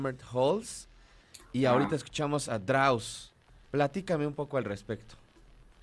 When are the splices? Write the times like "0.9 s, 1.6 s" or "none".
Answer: 3.6 s